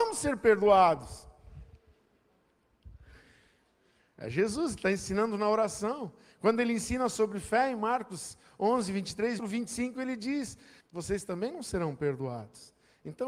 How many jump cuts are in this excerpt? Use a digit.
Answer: 2